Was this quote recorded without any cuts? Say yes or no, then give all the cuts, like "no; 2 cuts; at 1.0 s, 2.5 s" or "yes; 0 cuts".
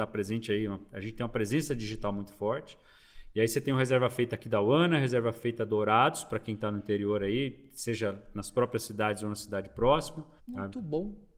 no; 1 cut; at 10.4 s